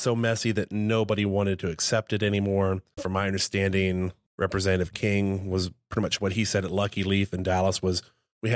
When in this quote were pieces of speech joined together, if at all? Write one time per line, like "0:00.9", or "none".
0:03.0